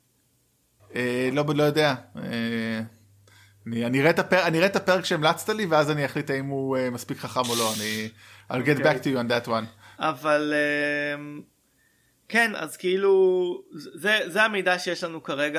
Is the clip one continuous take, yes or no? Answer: no